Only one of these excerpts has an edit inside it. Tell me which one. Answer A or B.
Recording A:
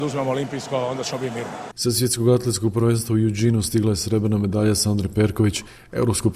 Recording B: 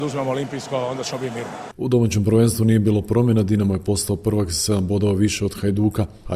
B